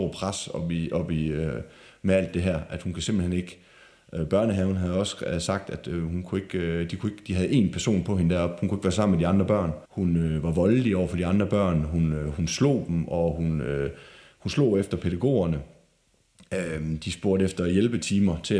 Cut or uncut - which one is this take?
cut